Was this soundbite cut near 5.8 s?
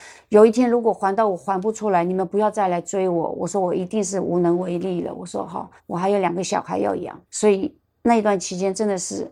yes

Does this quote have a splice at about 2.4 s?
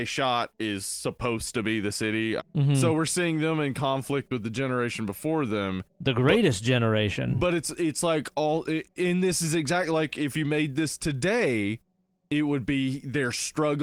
yes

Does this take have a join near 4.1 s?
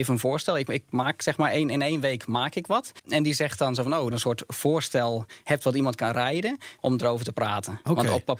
yes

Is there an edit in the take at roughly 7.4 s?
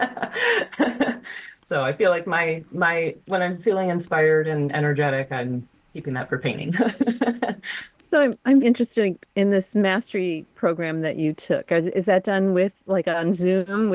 no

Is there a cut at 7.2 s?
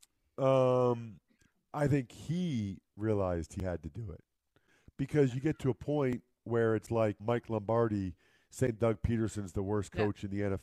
yes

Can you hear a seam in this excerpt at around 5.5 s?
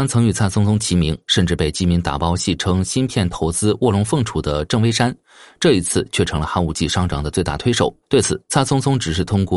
no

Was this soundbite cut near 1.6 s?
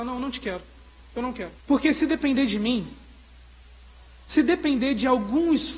yes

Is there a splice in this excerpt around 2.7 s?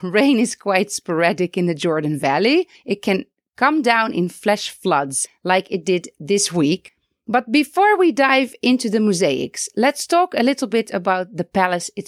yes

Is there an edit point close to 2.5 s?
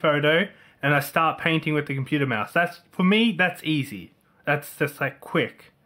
no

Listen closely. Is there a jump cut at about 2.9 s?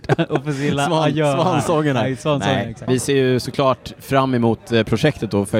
yes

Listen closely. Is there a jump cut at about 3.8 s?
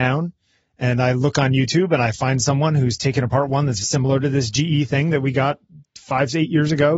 yes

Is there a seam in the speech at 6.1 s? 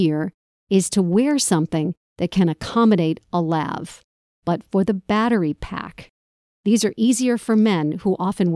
no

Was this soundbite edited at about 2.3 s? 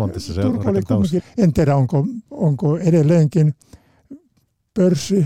yes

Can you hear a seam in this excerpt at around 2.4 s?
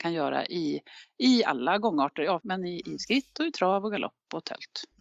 yes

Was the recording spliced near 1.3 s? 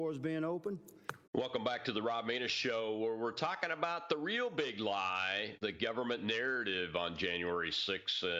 yes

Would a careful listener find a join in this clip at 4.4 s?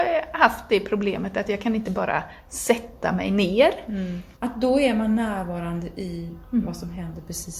yes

